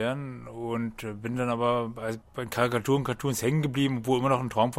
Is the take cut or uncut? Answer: uncut